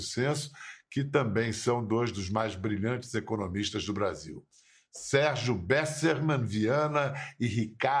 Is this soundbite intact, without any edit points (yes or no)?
yes